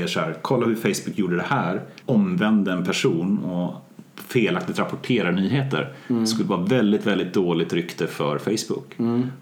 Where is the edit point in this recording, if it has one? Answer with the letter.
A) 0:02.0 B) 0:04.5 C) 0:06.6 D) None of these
A